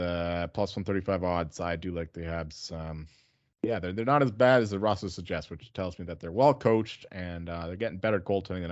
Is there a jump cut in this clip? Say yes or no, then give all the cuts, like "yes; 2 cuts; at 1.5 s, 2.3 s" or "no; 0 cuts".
no; 0 cuts